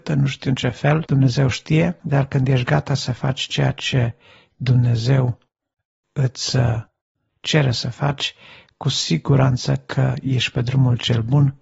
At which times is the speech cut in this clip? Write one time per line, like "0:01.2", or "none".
none